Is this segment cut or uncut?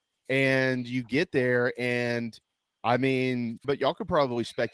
cut